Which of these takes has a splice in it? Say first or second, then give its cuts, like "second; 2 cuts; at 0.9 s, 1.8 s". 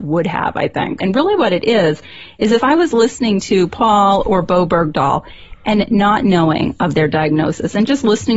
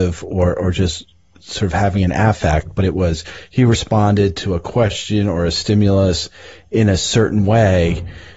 first; 1 cut; at 1.0 s